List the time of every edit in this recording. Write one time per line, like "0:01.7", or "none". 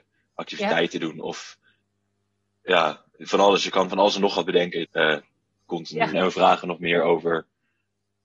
0:04.8
0:06.1